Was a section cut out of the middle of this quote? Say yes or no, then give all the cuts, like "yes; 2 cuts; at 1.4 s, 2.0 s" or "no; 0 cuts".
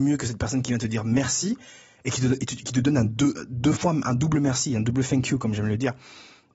no; 0 cuts